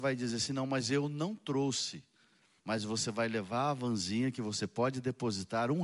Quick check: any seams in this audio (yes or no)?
yes